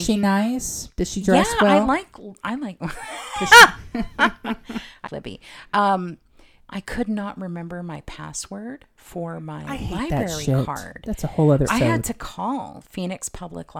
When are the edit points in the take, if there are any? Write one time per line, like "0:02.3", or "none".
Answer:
0:05.1
0:11.7